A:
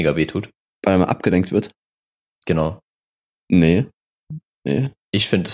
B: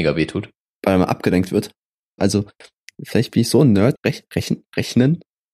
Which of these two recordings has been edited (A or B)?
B